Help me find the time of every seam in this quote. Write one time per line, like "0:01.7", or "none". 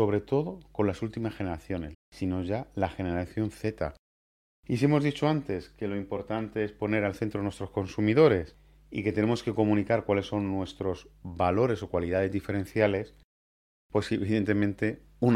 0:01.9
0:04.6

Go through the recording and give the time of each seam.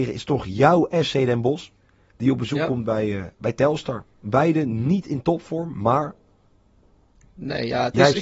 none

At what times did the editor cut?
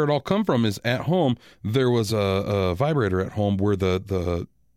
none

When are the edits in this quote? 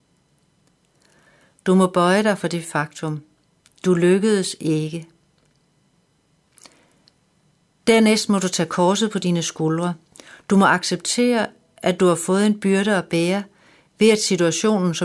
0:01.5

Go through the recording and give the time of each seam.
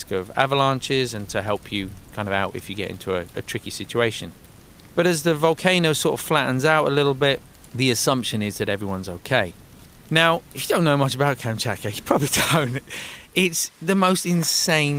none

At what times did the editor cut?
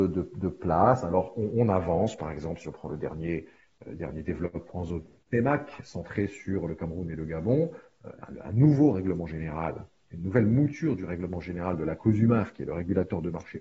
none

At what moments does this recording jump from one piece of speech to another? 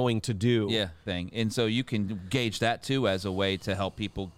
0:01.1

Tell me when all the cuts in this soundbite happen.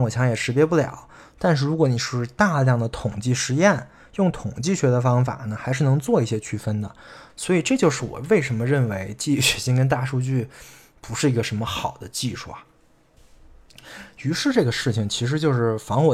0:07.3

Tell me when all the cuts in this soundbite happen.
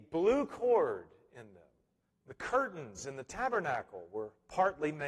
0:02.1

